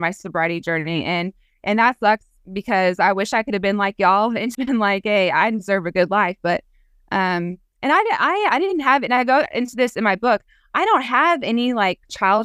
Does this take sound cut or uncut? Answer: cut